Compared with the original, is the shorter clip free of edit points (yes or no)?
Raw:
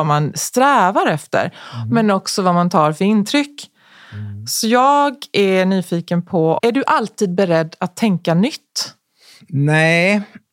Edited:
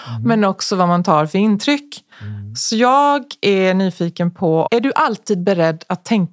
no